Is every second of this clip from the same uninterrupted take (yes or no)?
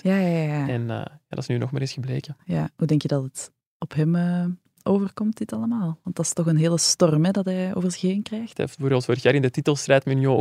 no